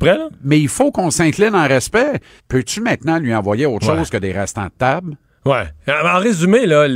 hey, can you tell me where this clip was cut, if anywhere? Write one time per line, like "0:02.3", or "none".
0:02.4